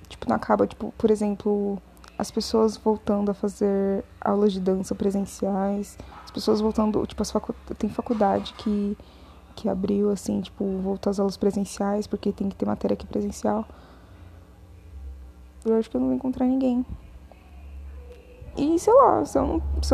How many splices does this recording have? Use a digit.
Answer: 2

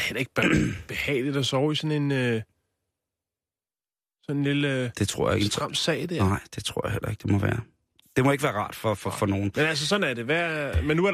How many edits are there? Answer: 1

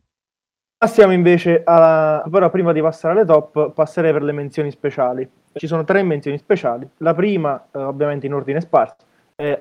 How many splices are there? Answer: 2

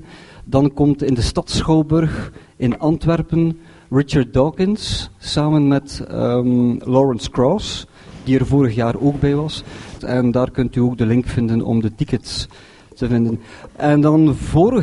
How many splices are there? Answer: 2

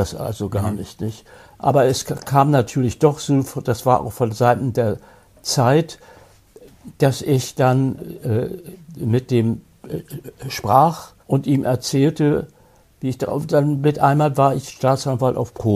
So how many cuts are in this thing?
1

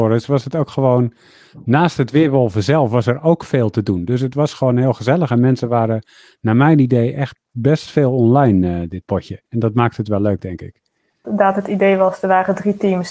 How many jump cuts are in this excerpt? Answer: 2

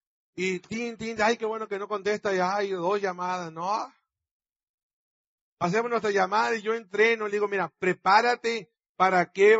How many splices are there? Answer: 0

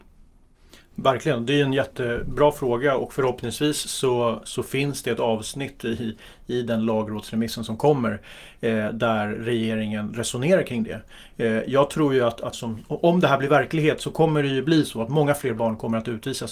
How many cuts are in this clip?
1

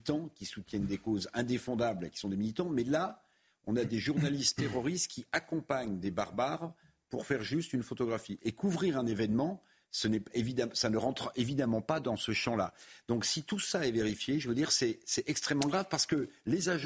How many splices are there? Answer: 0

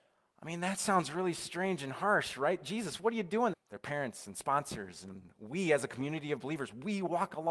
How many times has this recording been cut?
1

